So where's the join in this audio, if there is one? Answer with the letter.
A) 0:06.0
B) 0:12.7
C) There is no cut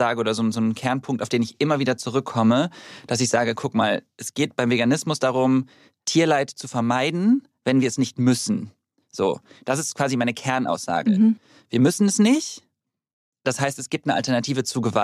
C